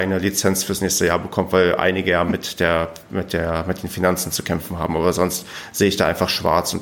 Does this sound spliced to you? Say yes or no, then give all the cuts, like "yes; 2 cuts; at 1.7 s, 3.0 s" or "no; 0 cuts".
no; 0 cuts